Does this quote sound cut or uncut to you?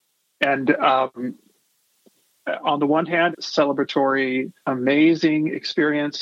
cut